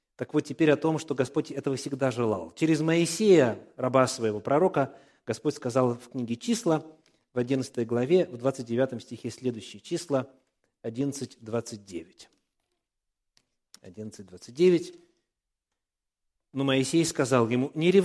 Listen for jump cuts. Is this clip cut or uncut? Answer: uncut